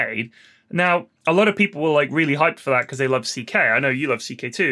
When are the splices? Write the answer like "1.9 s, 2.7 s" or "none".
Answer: none